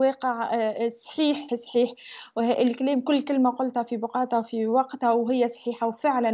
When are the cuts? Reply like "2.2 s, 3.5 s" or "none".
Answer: 1.5 s